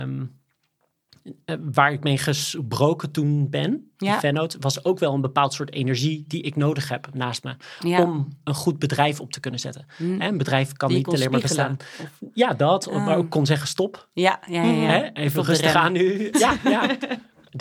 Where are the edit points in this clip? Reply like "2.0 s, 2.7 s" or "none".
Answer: 16.3 s

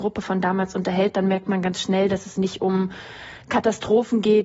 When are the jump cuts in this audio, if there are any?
none

